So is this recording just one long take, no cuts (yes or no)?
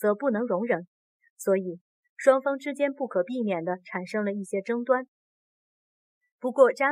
yes